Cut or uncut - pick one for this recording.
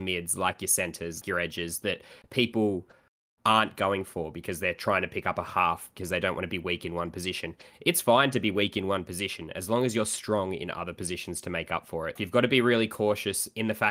cut